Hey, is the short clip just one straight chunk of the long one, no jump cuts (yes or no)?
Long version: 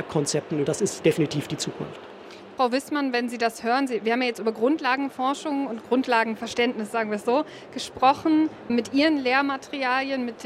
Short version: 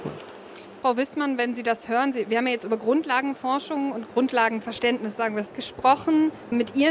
no